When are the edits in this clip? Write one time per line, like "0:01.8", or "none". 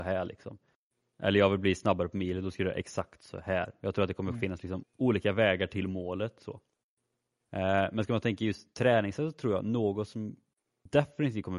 0:04.8